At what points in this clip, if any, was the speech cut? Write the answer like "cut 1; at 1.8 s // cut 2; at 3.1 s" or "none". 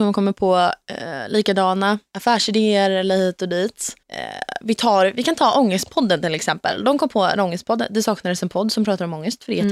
cut 1; at 4.0 s